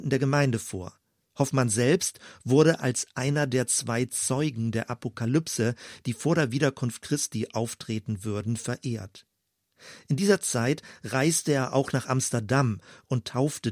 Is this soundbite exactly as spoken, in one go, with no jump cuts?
yes; 0 cuts

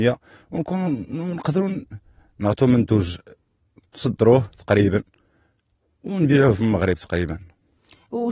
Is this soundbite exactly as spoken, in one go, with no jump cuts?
yes; 0 cuts

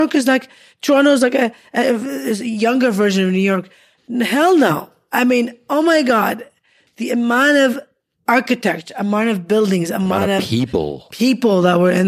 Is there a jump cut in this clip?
no; 0 cuts

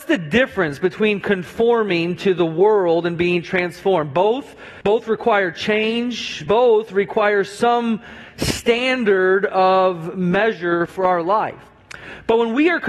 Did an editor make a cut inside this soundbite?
yes; 3 cuts; at 4.8 s, 6.5 s, 10.9 s

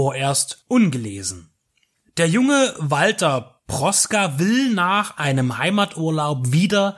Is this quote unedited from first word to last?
yes; 0 cuts

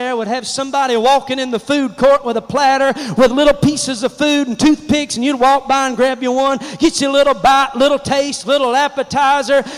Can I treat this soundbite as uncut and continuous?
yes; 0 cuts

